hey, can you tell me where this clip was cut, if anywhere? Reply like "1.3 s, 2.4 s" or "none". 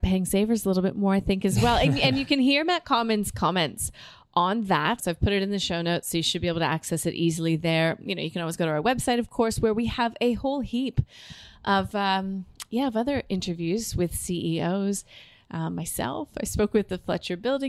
5.0 s